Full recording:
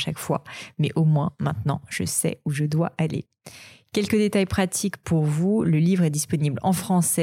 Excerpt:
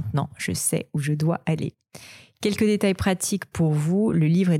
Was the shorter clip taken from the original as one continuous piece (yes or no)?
yes